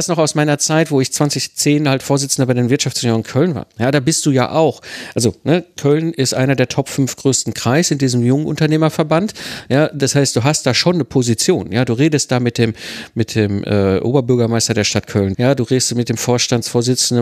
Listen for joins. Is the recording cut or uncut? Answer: cut